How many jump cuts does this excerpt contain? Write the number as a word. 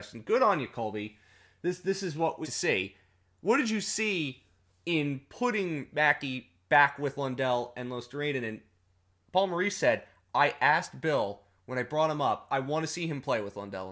one